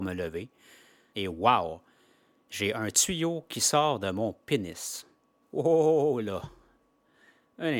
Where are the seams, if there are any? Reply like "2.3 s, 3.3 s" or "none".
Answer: 1.1 s, 5.4 s